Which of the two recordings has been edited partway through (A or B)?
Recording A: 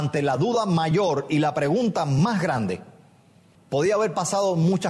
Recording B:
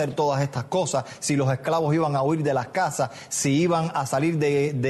A